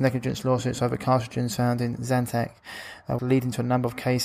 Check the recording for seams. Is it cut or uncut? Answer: cut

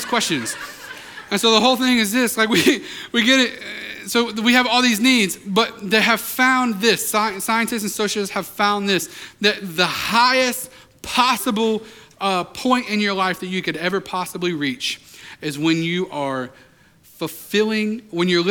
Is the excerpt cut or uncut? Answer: uncut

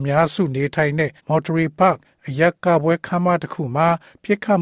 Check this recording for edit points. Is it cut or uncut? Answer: cut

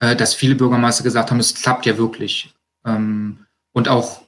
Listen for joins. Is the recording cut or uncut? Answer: uncut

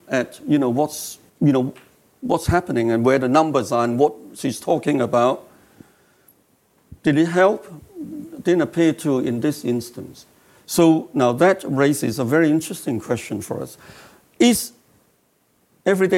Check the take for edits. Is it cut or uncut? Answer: cut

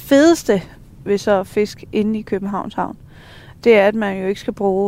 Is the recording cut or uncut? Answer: cut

